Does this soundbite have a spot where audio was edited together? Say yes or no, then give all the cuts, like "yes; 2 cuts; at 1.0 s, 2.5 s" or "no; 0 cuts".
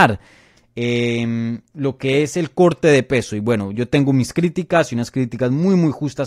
no; 0 cuts